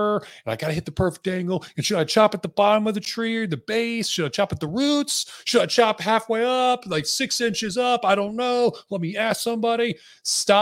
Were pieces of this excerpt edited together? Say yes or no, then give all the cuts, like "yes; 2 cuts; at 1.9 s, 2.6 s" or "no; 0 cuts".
no; 0 cuts